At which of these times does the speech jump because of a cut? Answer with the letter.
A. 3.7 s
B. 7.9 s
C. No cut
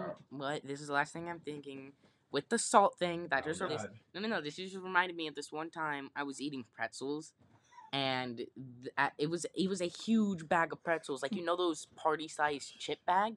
A